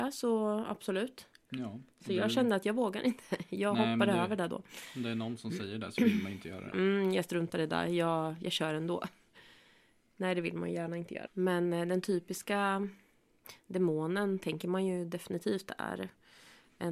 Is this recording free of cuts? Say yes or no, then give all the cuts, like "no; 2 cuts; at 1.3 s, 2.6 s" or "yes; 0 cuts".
no; 2 cuts; at 6.7 s, 11.3 s